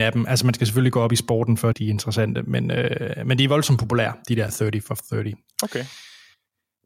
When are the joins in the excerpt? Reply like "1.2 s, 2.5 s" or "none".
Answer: 1.7 s